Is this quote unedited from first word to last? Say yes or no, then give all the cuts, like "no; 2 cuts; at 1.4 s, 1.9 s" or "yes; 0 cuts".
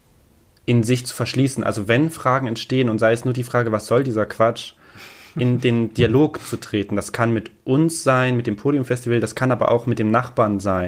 yes; 0 cuts